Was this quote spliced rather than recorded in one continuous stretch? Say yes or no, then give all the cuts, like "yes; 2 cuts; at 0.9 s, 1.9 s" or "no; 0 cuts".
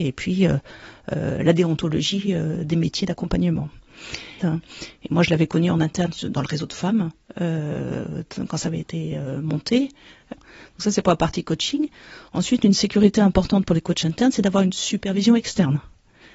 yes; 2 cuts; at 4.4 s, 10.3 s